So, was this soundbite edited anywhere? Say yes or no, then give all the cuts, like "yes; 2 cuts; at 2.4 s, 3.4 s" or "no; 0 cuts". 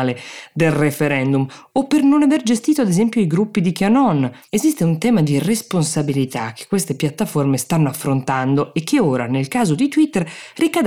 no; 0 cuts